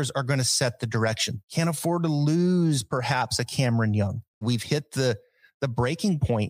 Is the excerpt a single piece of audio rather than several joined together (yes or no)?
no